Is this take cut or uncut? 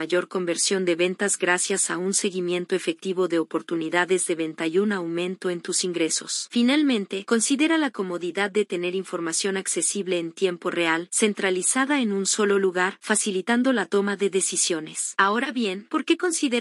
uncut